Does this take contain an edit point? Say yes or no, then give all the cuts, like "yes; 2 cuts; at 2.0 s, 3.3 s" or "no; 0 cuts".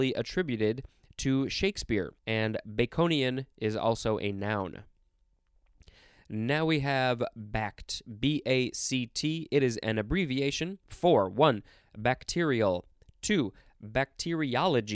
yes; 1 cut; at 2.2 s